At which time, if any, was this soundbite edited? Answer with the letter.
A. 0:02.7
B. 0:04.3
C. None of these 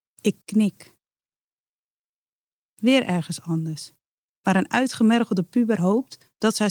C